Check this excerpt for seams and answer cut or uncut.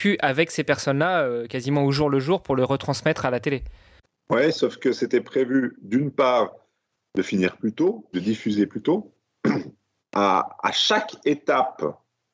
cut